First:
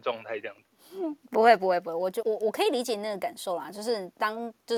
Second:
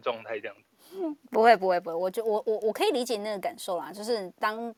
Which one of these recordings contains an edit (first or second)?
first